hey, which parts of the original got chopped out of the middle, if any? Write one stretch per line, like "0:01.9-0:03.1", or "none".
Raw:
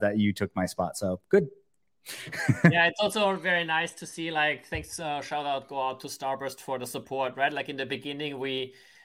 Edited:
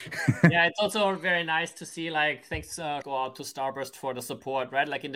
0:05.2-0:05.7